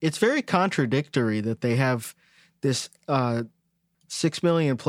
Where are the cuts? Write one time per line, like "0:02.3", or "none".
0:03.9